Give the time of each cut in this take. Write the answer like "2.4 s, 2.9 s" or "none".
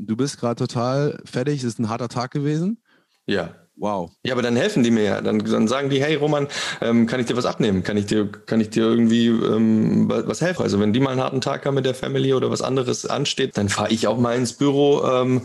4.2 s, 10.6 s, 13.5 s